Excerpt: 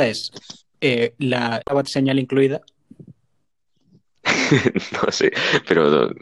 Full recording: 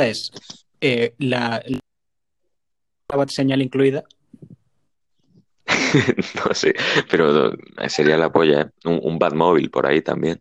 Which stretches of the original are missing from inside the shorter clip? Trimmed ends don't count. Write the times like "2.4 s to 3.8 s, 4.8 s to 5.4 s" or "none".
1.6 s to 3.1 s